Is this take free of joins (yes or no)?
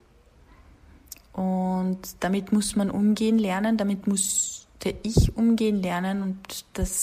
yes